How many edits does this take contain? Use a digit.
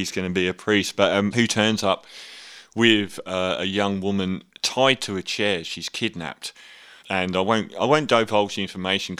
2